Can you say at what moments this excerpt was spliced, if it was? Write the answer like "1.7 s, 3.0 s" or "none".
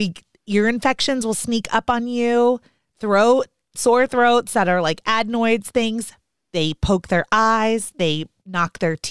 none

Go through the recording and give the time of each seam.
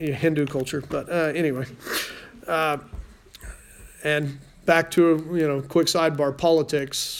none

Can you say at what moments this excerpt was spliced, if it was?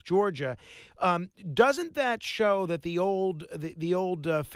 none

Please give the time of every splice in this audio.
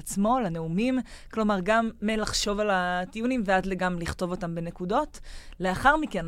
none

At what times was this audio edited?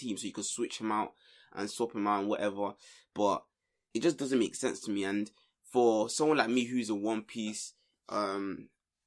3.9 s

